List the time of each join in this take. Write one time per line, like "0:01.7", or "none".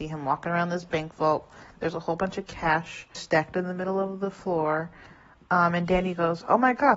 0:03.1